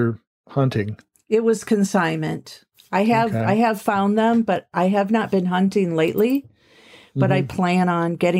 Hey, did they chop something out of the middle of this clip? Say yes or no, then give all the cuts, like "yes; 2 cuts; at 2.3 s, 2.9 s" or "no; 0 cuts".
no; 0 cuts